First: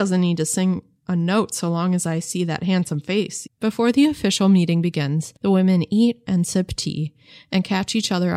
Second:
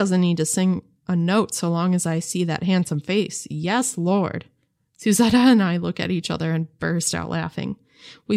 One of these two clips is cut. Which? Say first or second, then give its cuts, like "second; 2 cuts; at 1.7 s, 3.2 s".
first; 2 cuts; at 3.5 s, 5.4 s